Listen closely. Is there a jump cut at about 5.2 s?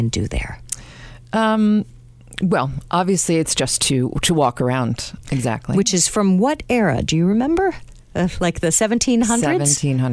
yes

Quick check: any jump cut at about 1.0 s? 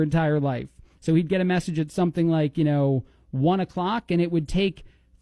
yes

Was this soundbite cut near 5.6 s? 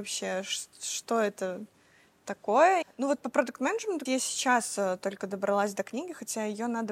no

